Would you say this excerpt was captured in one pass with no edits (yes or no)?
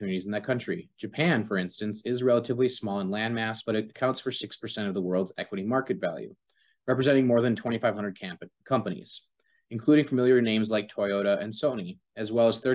yes